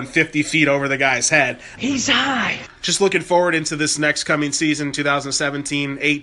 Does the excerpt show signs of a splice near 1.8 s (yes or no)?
yes